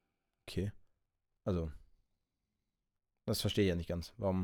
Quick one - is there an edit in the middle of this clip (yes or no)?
no